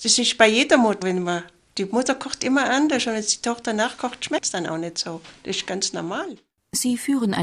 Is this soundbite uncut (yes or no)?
no